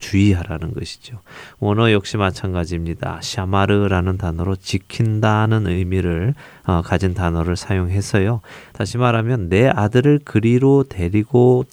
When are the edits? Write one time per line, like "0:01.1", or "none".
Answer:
0:08.7